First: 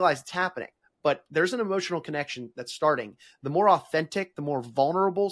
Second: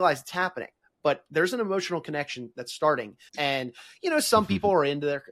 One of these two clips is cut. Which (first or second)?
second